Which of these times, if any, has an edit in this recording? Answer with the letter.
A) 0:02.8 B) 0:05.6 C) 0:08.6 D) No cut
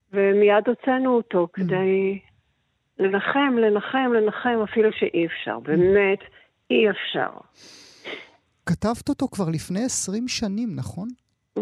C